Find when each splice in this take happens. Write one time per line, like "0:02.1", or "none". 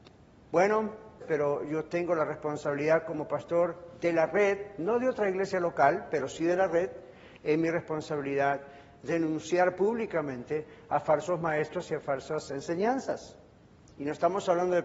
0:01.2

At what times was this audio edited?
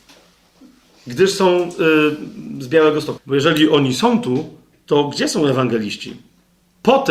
0:03.2
0:04.7

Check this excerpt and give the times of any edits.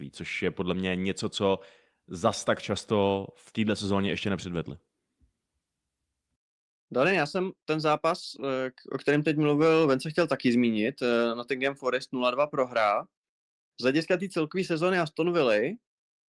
none

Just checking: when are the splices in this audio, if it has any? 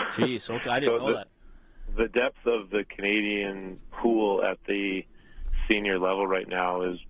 none

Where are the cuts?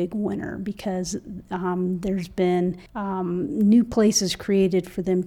0:02.9

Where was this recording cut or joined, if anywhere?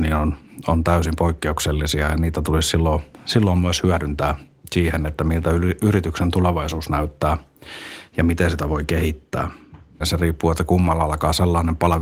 0:10.0

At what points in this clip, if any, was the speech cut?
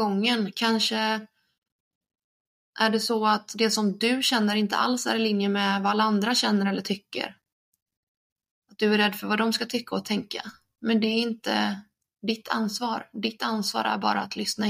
none

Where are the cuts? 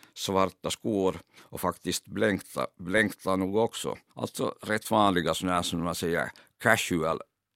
0:04.1

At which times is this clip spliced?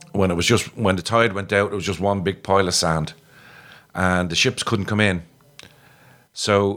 none

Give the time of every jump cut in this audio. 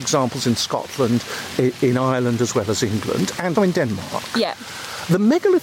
0:03.6

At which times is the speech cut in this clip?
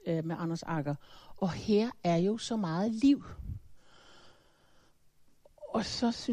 none

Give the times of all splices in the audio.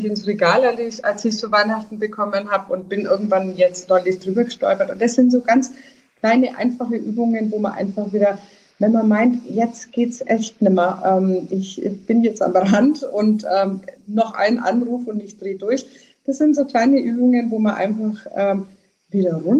none

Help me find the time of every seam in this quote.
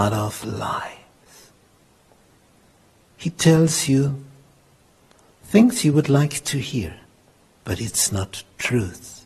none

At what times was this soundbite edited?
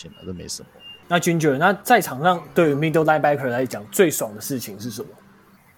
0:01.0

